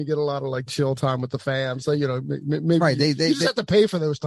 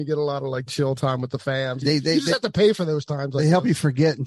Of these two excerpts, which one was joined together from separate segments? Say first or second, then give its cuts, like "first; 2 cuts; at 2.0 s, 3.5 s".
second; 1 cut; at 1.8 s